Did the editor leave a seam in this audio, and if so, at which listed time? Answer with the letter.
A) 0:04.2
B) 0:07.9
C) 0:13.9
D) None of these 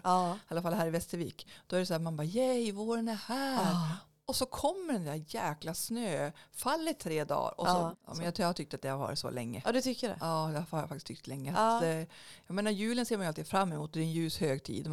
B